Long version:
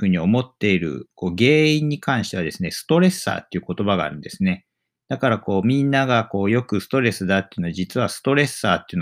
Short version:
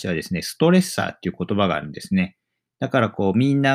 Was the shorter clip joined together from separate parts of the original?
no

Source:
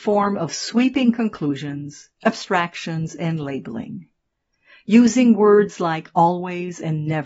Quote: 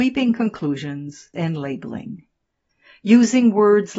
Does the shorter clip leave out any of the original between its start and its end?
yes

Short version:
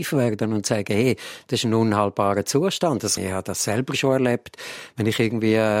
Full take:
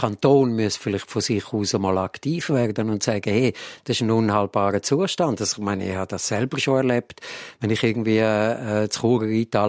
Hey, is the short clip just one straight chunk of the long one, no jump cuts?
no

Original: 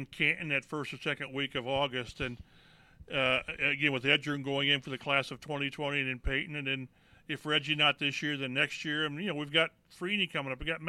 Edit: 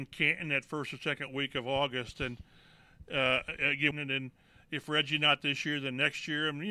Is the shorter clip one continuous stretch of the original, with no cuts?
no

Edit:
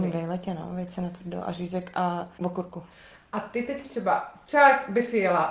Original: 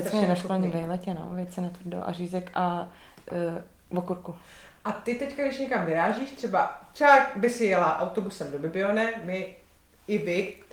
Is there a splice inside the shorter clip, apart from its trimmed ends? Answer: yes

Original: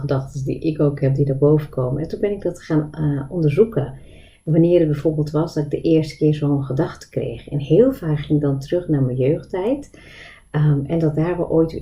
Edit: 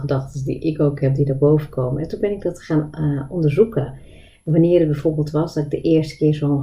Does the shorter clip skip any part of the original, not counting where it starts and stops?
no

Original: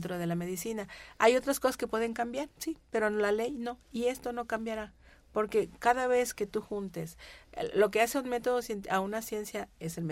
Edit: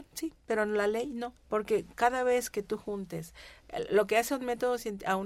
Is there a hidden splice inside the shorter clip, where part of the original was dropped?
yes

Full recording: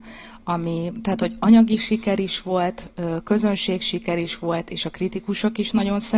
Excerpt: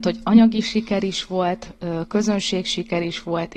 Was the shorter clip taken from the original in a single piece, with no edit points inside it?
yes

